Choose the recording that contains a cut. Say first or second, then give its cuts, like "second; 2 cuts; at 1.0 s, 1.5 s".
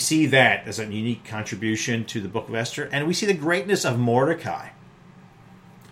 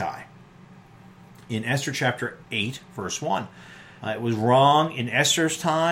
second; 1 cut; at 4.0 s